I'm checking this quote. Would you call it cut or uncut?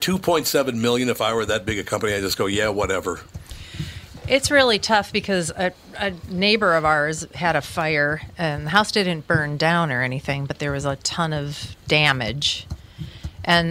uncut